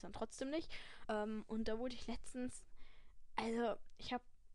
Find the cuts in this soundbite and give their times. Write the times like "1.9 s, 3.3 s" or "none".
1.0 s